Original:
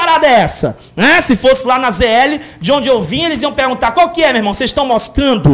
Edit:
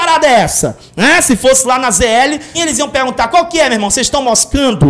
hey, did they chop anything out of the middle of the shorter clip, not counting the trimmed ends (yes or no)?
yes